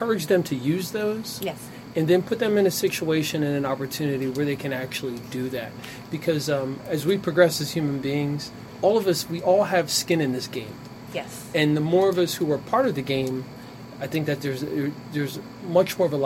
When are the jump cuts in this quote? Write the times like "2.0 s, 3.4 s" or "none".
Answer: none